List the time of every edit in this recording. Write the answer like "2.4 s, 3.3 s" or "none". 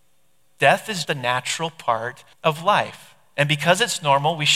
1.0 s, 2.3 s